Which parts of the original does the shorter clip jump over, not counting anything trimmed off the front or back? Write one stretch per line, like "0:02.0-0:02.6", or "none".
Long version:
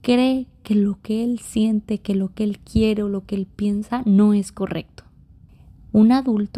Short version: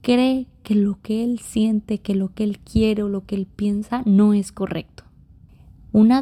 none